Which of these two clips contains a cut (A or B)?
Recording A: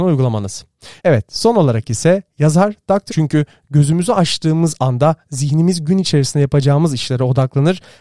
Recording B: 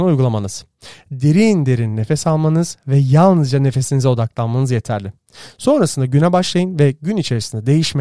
A